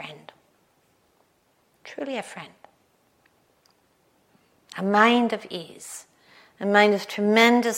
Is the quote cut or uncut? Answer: uncut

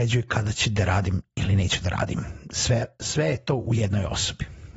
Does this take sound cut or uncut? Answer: uncut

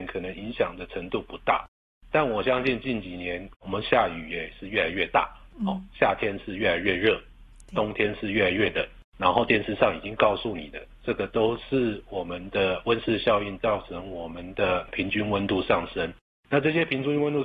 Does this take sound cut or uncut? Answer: cut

